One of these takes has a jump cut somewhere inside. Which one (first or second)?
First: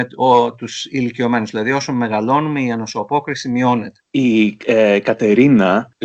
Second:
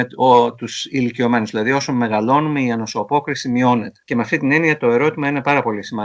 first